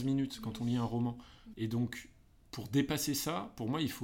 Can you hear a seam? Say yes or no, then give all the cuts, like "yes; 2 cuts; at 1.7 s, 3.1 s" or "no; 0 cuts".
yes; 1 cut; at 1.5 s